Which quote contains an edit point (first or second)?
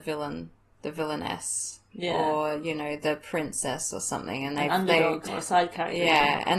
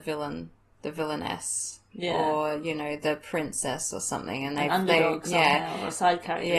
first